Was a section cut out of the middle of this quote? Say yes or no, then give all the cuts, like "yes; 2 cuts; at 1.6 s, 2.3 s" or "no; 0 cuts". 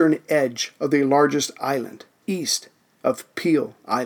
yes; 1 cut; at 2.2 s